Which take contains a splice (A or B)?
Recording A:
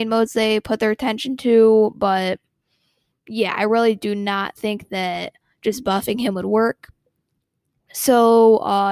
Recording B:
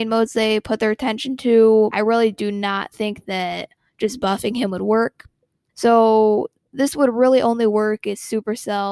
B